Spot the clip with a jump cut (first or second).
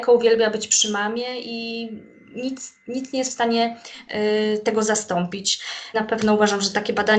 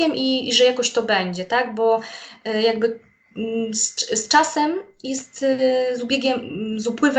first